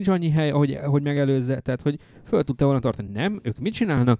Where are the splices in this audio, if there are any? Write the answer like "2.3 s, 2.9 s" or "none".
none

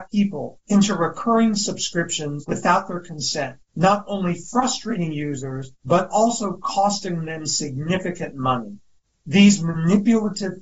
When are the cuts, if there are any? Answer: none

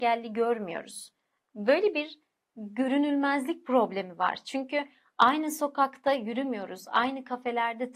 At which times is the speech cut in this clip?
none

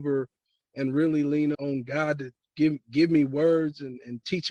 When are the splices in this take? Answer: 1.5 s

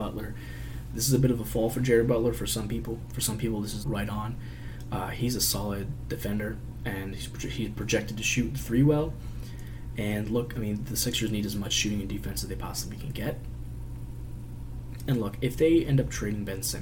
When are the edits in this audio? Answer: 3.8 s

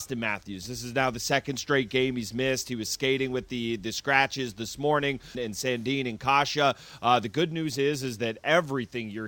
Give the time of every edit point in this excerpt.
5.3 s

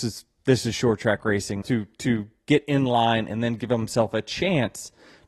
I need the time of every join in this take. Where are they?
1.6 s

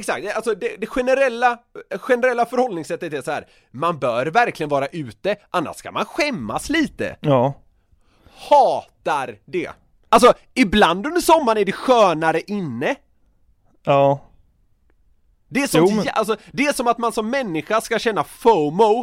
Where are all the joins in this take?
10.1 s

